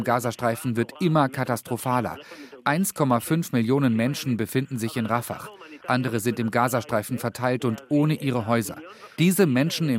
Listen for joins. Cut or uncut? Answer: uncut